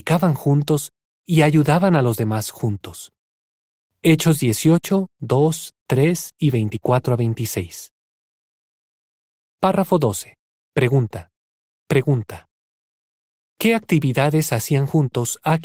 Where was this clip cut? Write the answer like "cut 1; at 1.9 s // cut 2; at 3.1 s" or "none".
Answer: cut 1; at 9.4 s // cut 2; at 11.7 s